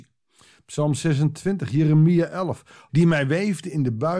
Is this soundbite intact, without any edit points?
no; 1 cut; at 2.9 s

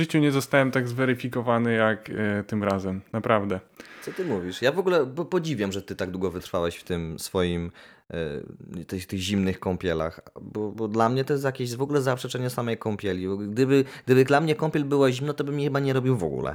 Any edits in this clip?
no; 0 cuts

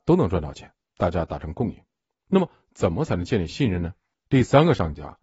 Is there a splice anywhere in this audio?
yes; 2 cuts; at 2.2 s, 4.1 s

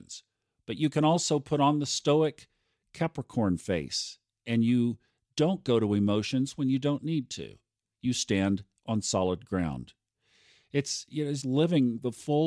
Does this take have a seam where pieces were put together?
yes; 1 cut; at 11.4 s

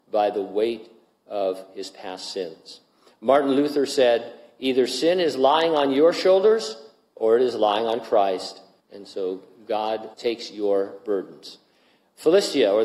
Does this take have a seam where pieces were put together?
yes; 2 cuts; at 8.8 s, 10.1 s

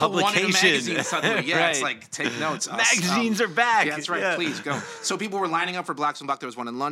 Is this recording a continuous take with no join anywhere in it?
yes; 0 cuts

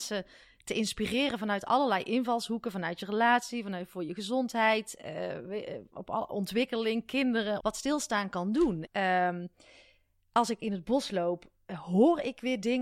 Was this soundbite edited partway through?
yes; 2 cuts; at 7.6 s, 8.9 s

